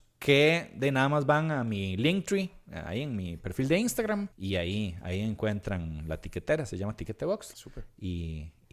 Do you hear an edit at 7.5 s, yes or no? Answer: yes